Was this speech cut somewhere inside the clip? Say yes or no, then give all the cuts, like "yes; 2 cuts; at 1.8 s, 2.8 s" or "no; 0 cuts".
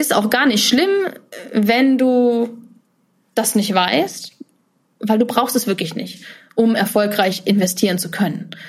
no; 0 cuts